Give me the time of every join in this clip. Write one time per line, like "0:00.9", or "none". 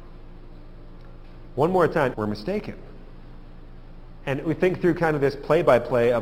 0:02.1